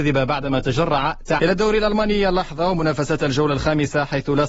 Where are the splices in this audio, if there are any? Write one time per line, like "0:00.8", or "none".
0:01.4